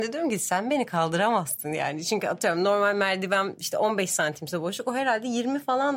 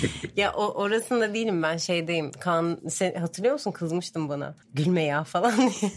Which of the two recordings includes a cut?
second; 1 cut; at 4.6 s

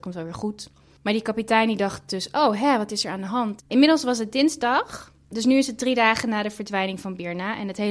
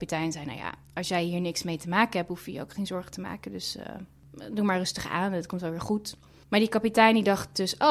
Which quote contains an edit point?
first; 1 cut; at 3.6 s

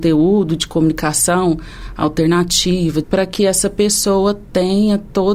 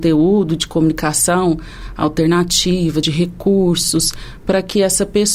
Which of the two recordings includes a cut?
first; 1 cut; at 3.0 s

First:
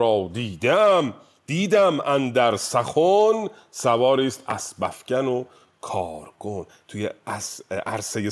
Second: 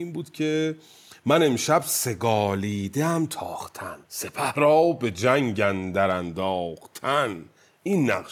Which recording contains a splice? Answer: second; 1 cut; at 4.0 s

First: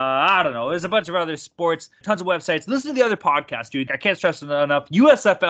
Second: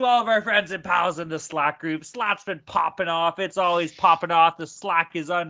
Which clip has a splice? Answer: first; 2 cuts; at 2.0 s, 3.9 s

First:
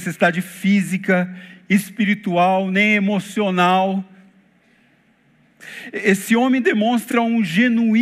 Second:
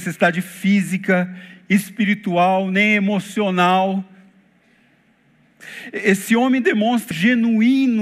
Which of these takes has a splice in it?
second; 1 cut; at 7.1 s

